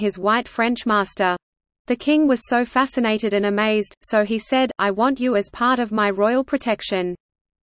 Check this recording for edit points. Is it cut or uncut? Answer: cut